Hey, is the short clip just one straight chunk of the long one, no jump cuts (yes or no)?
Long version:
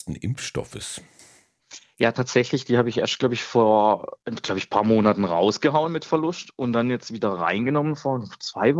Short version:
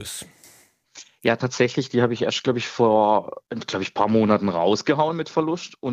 yes